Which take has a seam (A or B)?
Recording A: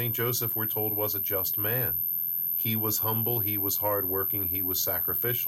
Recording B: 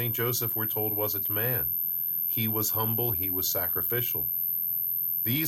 B